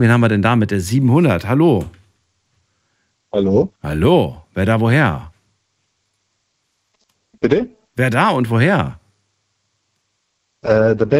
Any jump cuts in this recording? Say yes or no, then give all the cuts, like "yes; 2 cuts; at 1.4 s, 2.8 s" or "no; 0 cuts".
no; 0 cuts